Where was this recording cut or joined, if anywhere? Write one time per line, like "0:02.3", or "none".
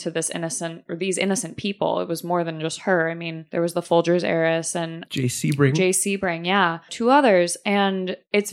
0:06.9